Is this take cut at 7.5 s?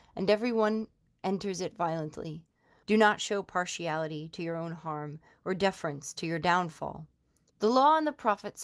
yes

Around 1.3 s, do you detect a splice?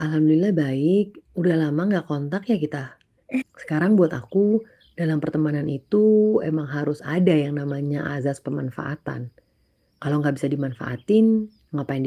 no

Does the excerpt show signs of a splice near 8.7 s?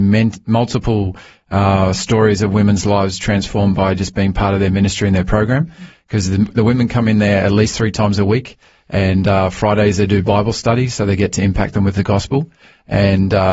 no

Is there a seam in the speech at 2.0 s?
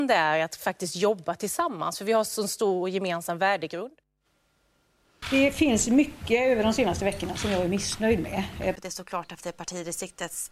no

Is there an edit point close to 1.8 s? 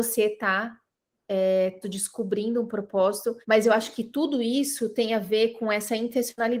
yes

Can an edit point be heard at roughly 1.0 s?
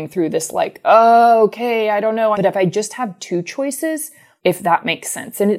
no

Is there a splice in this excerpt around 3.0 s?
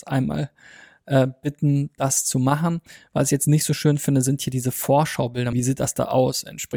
no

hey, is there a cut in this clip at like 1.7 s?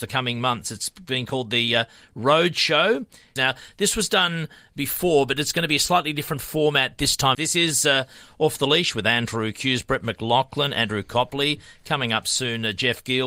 no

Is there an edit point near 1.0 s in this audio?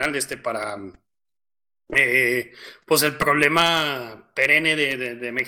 no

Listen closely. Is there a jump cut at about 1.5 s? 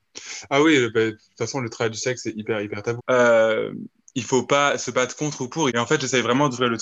no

